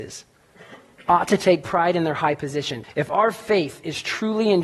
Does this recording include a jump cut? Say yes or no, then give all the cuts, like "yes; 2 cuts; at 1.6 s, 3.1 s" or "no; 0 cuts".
yes; 1 cut; at 2.8 s